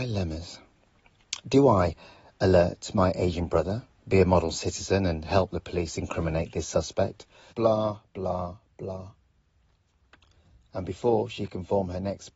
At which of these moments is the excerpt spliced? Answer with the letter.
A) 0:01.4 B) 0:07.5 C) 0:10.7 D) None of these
B